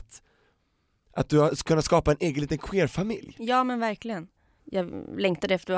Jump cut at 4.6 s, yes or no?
yes